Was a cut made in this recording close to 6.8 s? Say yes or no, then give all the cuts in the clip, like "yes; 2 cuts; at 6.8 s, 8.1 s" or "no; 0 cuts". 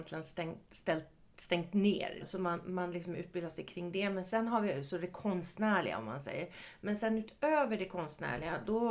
no; 1 cut; at 2.2 s